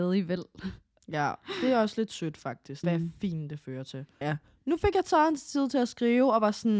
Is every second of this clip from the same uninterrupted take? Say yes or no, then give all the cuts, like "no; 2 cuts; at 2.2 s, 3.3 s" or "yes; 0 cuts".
no; 2 cuts; at 2.8 s, 4.2 s